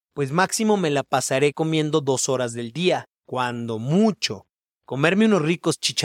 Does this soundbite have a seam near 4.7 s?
yes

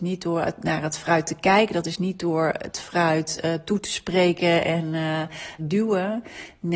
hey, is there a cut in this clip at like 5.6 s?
yes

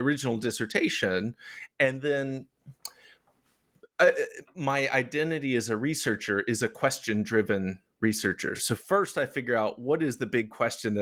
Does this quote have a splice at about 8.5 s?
no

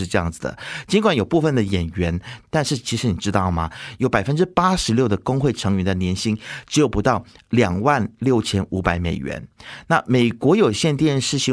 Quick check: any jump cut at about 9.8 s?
no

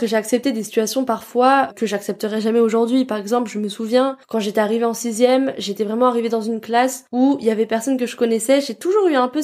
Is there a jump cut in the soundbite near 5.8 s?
no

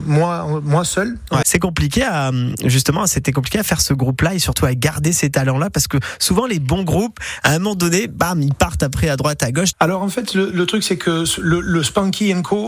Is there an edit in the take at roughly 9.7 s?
yes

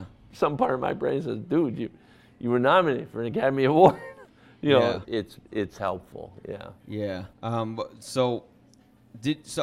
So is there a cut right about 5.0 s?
yes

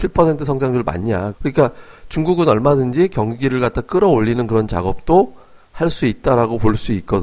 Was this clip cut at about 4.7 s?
no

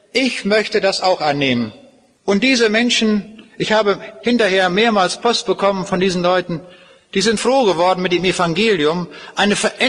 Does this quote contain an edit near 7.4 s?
yes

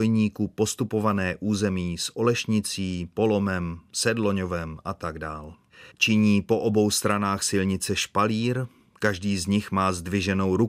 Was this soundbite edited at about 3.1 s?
no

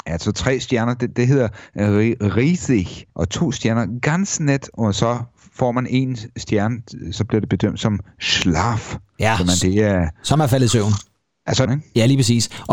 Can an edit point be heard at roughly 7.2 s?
yes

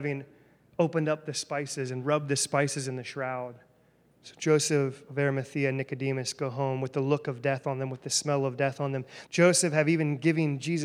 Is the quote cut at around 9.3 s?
yes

